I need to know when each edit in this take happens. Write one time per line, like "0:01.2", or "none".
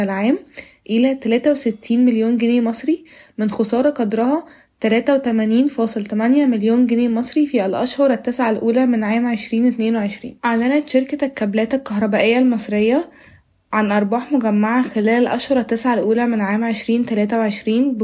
0:10.4